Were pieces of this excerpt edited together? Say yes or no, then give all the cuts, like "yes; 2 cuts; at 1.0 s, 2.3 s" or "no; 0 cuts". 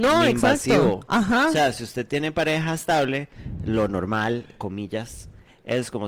no; 0 cuts